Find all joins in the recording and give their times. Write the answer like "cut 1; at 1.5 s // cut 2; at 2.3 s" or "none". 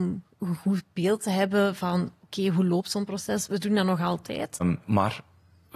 cut 1; at 3.5 s // cut 2; at 4.6 s